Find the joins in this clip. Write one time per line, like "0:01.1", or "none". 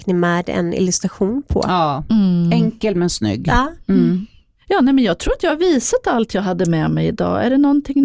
none